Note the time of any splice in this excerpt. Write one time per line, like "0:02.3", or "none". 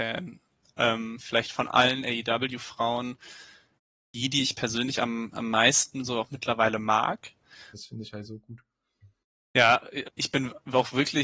0:07.7
0:10.0